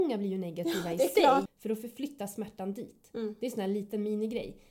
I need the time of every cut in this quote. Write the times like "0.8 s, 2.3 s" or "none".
1.5 s